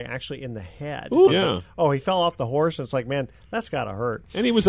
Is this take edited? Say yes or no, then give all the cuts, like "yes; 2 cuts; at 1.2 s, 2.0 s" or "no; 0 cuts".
yes; 1 cut; at 1.3 s